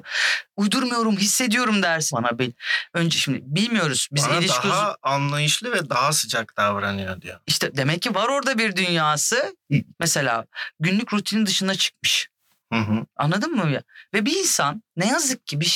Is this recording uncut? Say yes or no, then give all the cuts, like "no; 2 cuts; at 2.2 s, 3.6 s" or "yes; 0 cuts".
no; 3 cuts; at 2.1 s, 9.9 s, 14.1 s